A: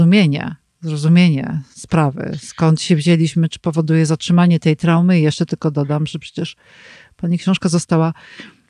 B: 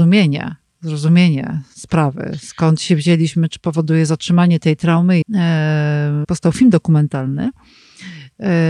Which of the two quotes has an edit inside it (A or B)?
B